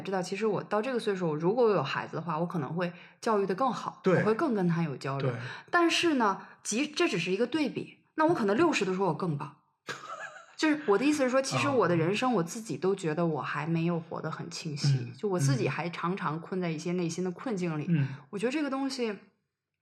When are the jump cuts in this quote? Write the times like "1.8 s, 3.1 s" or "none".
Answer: none